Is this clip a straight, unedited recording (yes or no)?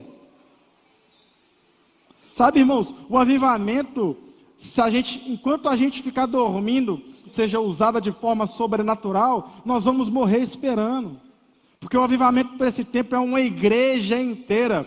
no